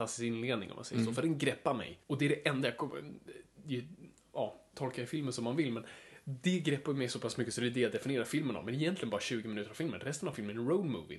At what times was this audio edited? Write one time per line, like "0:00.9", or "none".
0:02.0

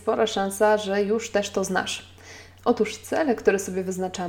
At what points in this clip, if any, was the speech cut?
0:02.6

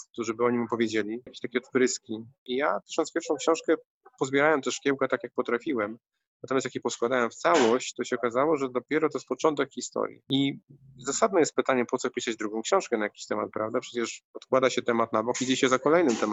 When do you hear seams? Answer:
0:01.3

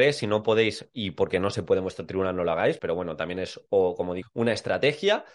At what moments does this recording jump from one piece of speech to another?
0:02.8
0:04.2

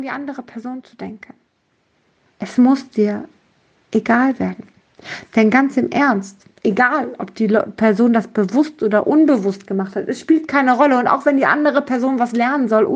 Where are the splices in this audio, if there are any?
none

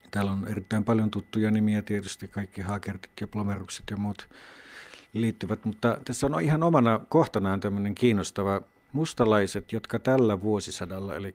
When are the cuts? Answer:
0:08.9

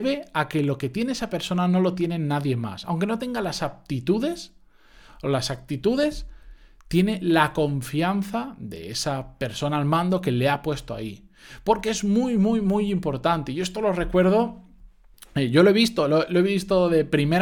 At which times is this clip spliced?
none

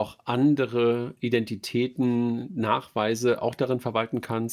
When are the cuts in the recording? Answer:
none

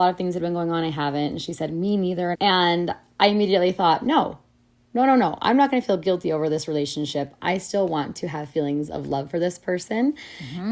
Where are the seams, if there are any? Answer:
0:02.3
0:07.4

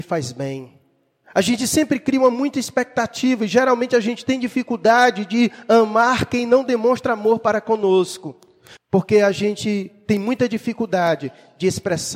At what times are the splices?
0:01.2
0:08.8

